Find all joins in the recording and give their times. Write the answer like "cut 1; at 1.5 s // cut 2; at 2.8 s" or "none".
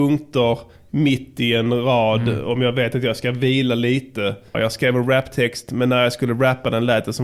cut 1; at 4.5 s